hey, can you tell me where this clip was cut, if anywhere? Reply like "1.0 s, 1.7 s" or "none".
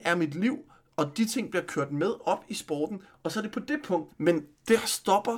4.1 s